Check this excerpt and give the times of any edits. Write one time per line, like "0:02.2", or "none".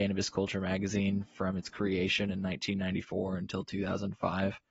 none